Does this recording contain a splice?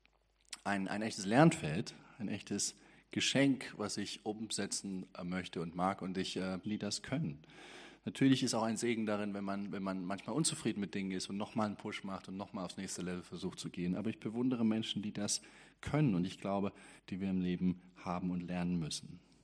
yes; 2 cuts; at 6.6 s, 17.0 s

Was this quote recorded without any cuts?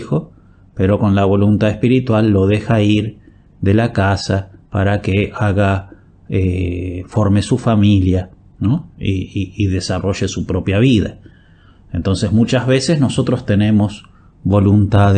yes; 0 cuts

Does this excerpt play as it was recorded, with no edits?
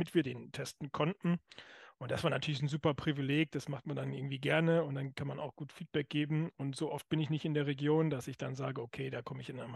yes; 0 cuts

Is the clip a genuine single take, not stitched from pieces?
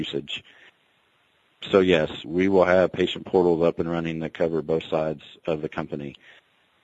no; 1 cut; at 2.2 s

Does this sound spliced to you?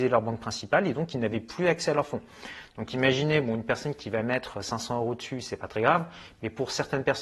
no; 0 cuts

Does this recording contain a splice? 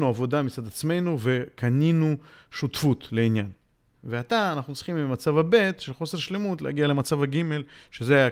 yes; 1 cut; at 3.9 s

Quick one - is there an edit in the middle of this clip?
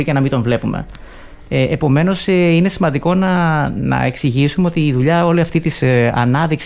no; 0 cuts

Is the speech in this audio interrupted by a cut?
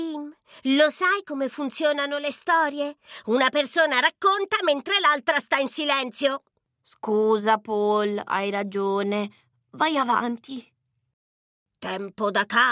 no; 0 cuts

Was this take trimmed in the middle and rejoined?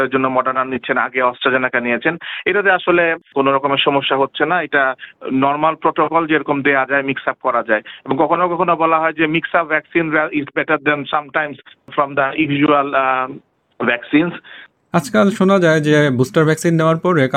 no; 0 cuts

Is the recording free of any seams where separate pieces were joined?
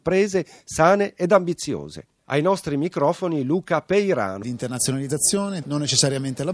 no; 2 cuts; at 4.4 s, 5.6 s

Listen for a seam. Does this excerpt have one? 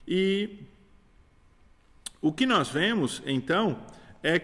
no; 0 cuts

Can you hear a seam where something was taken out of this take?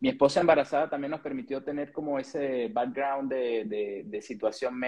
no; 0 cuts

